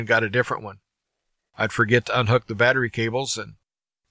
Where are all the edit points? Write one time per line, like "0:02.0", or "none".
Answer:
0:01.5